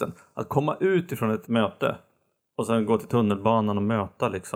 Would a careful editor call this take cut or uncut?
cut